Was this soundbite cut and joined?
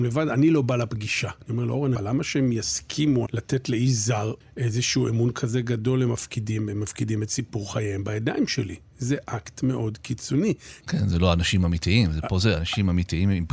yes; 2 cuts; at 2.0 s, 10.8 s

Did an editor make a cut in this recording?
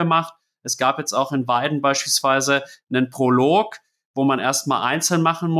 no; 0 cuts

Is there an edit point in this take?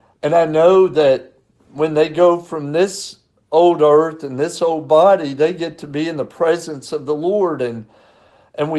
no; 0 cuts

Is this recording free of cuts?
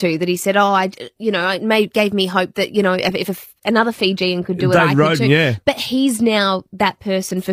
yes; 0 cuts

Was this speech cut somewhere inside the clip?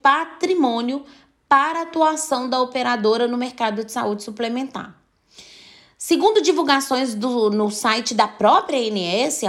no; 0 cuts

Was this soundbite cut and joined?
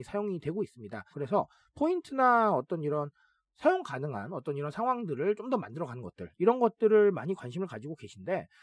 yes; 1 cut; at 1.1 s

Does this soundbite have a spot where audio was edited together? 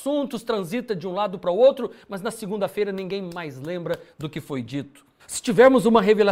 yes; 1 cut; at 5.2 s

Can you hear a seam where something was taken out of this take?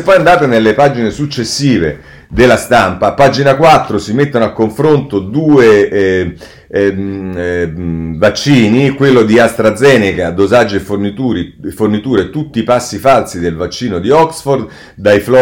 no; 0 cuts

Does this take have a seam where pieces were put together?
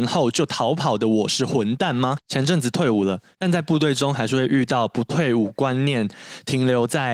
yes; 2 cuts; at 2.2 s, 3.3 s

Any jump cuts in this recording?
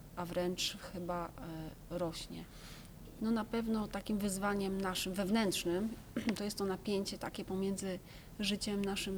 yes; 1 cut; at 3.2 s

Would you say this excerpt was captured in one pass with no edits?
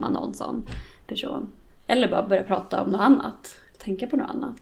no; 1 cut; at 1.7 s

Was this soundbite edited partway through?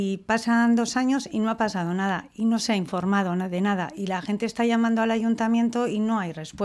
no; 0 cuts

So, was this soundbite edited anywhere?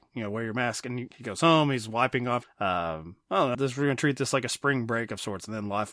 yes; 2 cuts; at 2.4 s, 3.5 s

